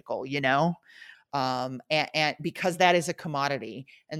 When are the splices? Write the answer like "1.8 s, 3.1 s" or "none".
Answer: 1.1 s